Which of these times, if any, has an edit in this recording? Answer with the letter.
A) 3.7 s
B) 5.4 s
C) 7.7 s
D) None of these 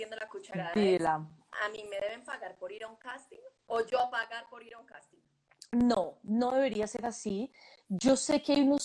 A